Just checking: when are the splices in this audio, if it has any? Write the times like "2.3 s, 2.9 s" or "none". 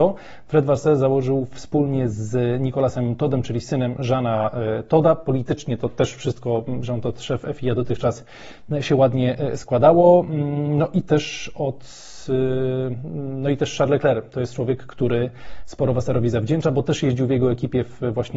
none